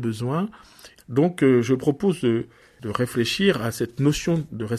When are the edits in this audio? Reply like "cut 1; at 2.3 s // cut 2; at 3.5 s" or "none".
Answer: cut 1; at 1.0 s